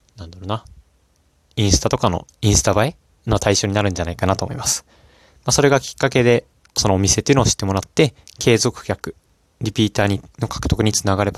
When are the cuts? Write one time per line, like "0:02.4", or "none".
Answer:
none